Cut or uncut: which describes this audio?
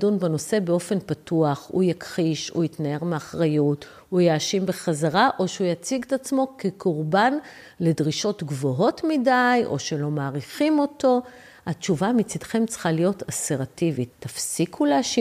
cut